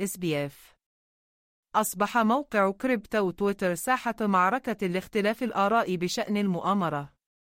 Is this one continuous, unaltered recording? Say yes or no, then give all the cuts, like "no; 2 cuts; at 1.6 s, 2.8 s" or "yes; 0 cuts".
yes; 0 cuts